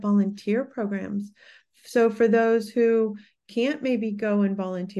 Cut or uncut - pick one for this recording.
uncut